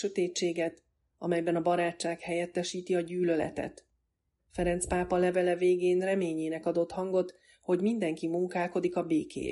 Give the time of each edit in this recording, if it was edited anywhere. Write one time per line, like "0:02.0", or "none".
0:04.4

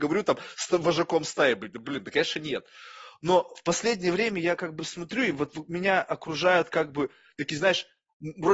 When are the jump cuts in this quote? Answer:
none

